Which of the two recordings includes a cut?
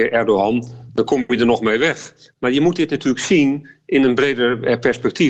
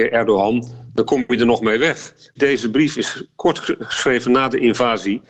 second; 1 cut; at 2.4 s

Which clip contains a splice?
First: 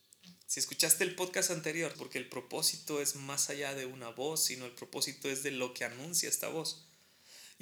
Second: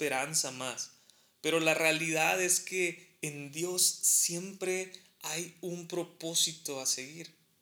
first; 1 cut; at 1.9 s

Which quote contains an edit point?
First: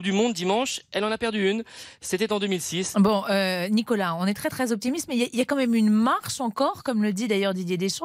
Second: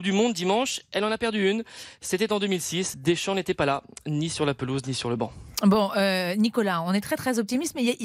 first; 1 cut; at 2.9 s

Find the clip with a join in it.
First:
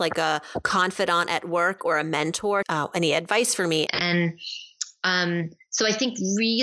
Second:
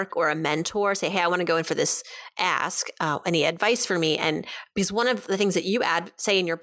first; 2 cuts; at 2.6 s, 3.9 s

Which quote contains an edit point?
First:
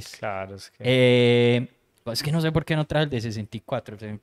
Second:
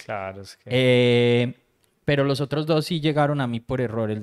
first; 1 cut; at 2.1 s

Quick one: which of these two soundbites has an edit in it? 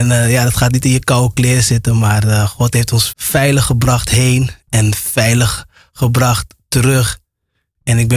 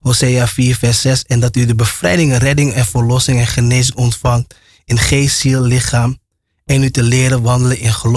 first; 1 cut; at 3.1 s

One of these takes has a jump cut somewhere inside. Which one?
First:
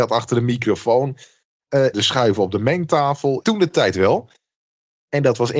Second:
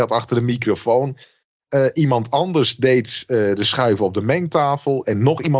first; 2 cuts; at 1.9 s, 3.4 s

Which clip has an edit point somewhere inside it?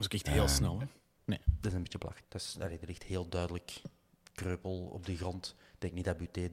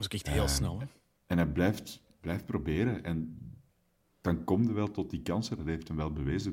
first; 2 cuts; at 1.2 s, 2.2 s

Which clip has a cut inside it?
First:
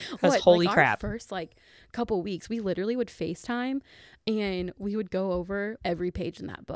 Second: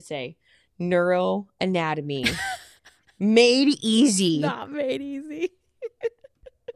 first; 1 cut; at 5.8 s

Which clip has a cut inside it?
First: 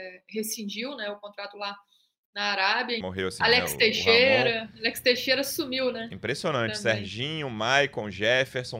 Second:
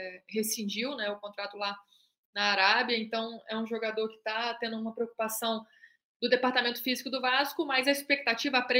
first; 1 cut; at 3.0 s

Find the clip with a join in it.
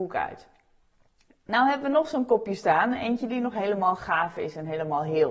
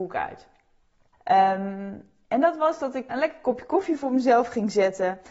second; 2 cuts; at 1.1 s, 3.1 s

